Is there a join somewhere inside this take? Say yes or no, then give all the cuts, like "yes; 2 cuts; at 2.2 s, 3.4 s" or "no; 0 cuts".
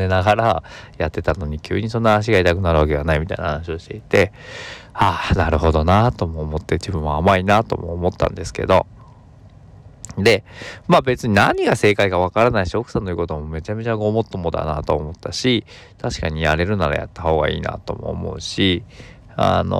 no; 0 cuts